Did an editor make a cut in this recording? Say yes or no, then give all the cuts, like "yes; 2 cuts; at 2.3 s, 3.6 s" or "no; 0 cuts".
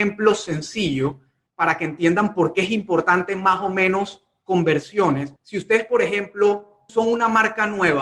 yes; 2 cuts; at 5.4 s, 6.9 s